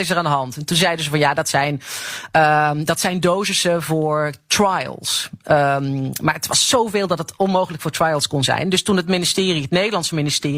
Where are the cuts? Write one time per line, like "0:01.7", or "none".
none